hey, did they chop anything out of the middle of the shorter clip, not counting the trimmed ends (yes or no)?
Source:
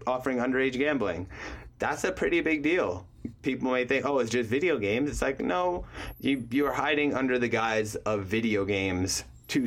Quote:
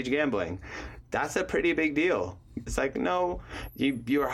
yes